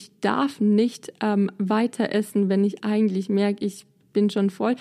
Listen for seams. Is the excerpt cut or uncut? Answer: uncut